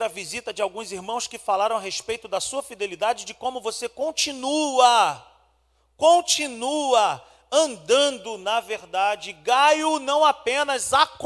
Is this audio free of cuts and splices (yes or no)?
yes